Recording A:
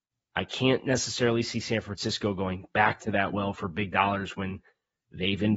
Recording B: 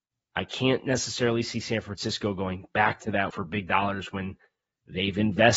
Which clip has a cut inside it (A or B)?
B